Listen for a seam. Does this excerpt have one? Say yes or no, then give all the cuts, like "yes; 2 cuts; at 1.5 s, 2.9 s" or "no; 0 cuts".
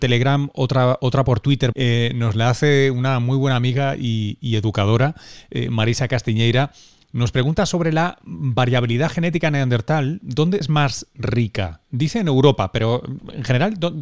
yes; 2 cuts; at 1.7 s, 10.6 s